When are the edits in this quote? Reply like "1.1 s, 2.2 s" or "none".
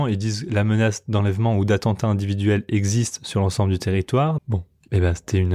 4.4 s